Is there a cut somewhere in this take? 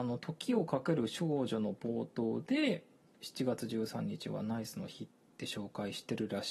yes; 1 cut; at 3.2 s

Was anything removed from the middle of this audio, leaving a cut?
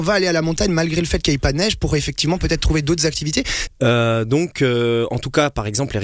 yes; 1 cut; at 3.7 s

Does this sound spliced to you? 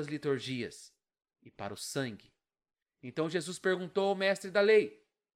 yes; 1 cut; at 2.8 s

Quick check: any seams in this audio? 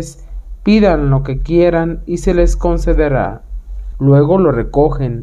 yes; 1 cut; at 3.9 s

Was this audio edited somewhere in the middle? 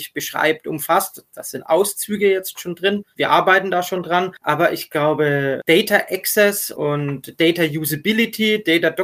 no; 0 cuts

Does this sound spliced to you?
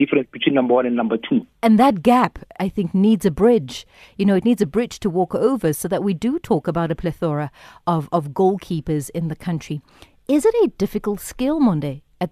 yes; 1 cut; at 2.6 s

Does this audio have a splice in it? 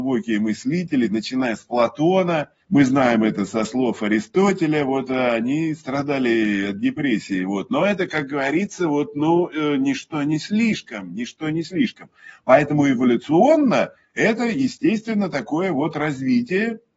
yes; 1 cut; at 2.6 s

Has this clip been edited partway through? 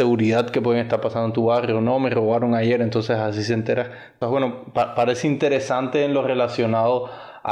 yes; 1 cut; at 4.2 s

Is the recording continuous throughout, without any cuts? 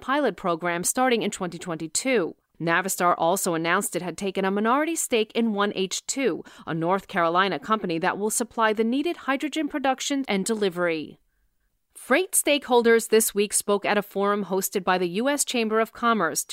no; 1 cut; at 10.2 s

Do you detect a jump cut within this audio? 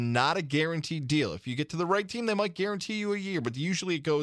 no; 0 cuts

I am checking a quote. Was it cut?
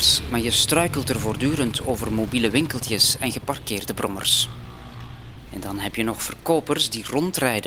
yes; 1 cut; at 5.5 s

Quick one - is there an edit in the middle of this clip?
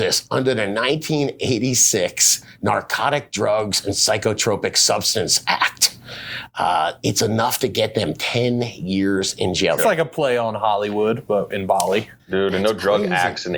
yes; 2 cuts; at 9.8 s, 12.2 s

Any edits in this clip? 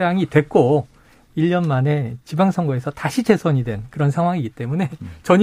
no; 0 cuts

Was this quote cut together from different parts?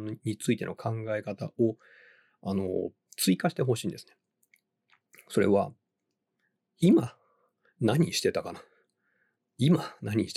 no; 0 cuts

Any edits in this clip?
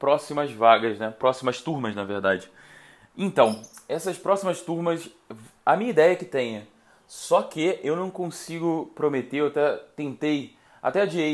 no; 0 cuts

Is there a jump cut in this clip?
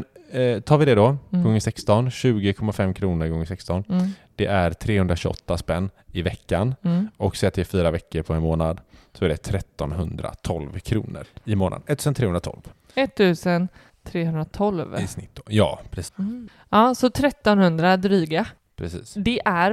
yes; 2 cuts; at 16.1 s, 18.6 s

